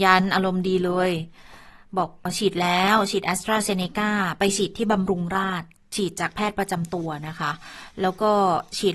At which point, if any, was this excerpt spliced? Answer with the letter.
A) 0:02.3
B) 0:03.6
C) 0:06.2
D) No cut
A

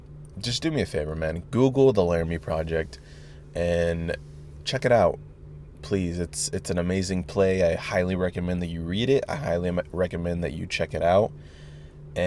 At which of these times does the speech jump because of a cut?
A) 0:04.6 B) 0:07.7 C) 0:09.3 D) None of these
A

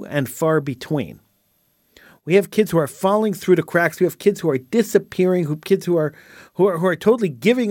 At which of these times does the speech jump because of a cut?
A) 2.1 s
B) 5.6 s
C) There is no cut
C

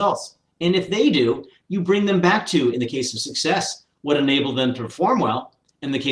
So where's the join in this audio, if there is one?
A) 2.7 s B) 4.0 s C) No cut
C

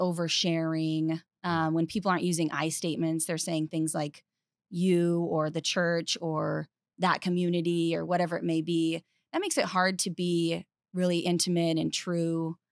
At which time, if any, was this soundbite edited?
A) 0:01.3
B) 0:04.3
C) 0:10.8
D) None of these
D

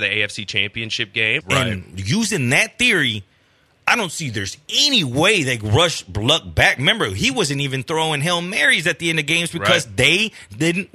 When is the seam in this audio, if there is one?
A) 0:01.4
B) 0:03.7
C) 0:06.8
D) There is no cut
A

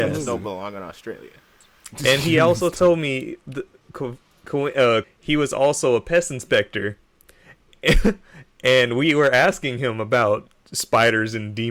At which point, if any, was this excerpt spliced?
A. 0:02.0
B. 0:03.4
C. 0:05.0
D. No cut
C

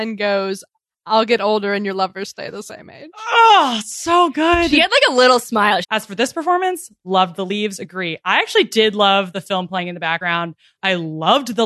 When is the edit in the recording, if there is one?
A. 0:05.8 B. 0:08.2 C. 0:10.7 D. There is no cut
A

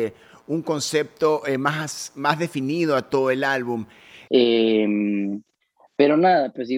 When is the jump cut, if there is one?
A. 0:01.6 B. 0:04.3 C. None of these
B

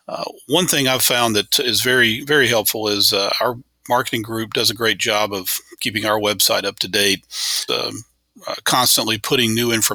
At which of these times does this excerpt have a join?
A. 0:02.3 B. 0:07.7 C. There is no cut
B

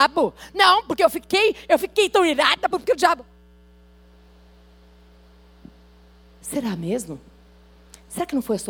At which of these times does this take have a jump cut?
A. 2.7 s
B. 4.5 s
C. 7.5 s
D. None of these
A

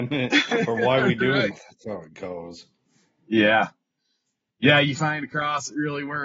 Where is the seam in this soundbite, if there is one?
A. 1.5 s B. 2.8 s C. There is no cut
A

